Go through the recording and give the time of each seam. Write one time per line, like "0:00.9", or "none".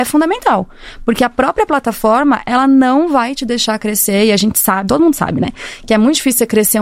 0:04.9